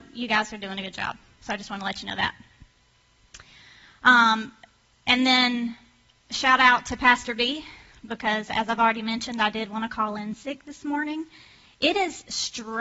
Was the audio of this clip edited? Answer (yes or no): no